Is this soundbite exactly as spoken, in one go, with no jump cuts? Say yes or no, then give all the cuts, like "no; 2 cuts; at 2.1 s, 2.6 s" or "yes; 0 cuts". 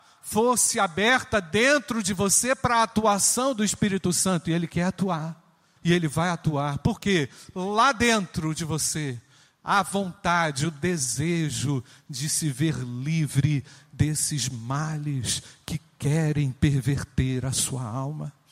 no; 1 cut; at 5.8 s